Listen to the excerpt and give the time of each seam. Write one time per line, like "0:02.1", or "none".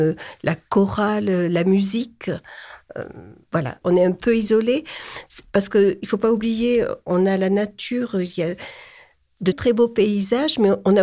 0:03.8
0:09.5